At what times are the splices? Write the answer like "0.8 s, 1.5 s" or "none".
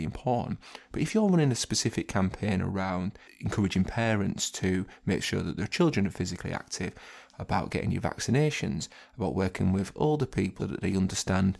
10.6 s